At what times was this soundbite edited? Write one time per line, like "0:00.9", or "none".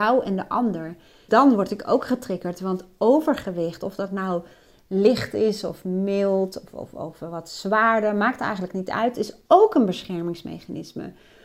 0:01.3

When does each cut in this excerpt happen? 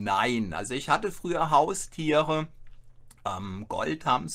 none

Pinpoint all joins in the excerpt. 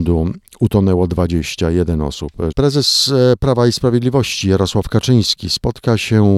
0:02.5

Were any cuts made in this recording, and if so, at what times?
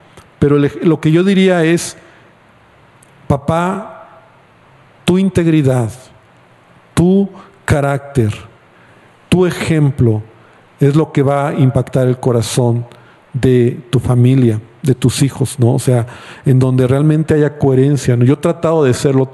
none

